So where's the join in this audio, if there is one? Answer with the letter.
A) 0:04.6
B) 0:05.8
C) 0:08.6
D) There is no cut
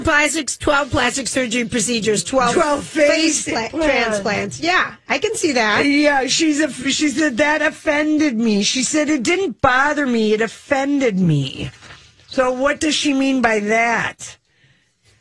D